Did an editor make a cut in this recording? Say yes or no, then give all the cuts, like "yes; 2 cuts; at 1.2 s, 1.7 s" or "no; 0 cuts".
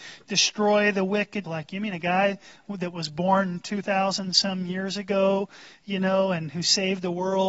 yes; 1 cut; at 1.4 s